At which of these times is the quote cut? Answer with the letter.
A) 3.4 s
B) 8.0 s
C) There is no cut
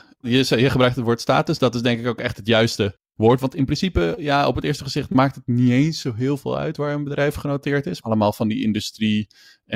B